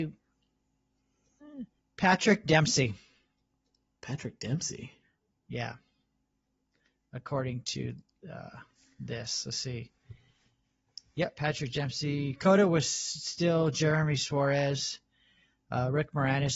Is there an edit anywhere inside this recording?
no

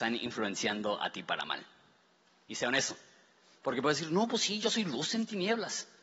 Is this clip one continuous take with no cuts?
yes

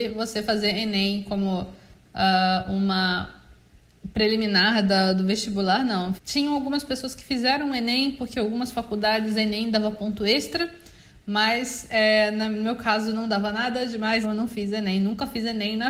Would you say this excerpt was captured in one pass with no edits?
no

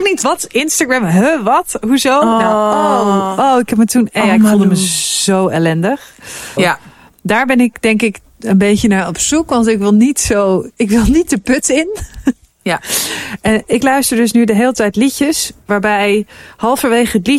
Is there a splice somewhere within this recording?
yes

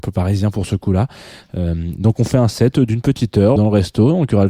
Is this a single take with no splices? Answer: no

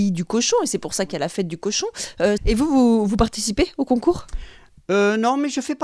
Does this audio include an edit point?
yes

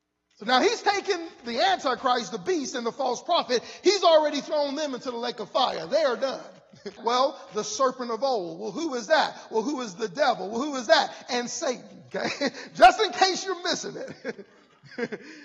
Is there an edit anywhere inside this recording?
yes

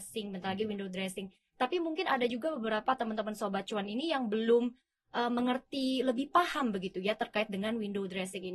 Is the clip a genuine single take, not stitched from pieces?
yes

